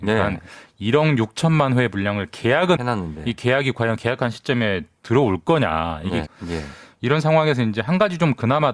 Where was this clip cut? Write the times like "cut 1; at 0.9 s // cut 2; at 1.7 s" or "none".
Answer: cut 1; at 2.8 s // cut 2; at 6.3 s